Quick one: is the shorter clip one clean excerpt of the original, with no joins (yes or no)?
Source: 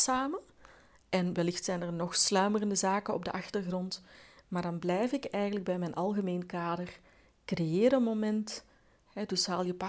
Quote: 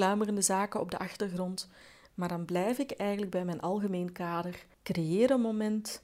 no